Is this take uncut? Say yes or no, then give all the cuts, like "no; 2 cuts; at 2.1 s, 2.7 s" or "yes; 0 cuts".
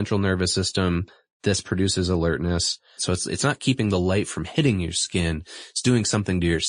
no; 1 cut; at 3.0 s